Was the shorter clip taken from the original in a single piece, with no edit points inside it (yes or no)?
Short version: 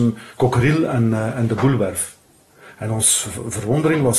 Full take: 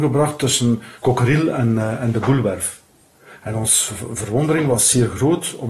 yes